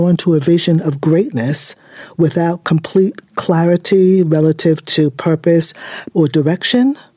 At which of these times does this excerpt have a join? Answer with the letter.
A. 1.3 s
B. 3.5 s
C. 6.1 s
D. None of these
C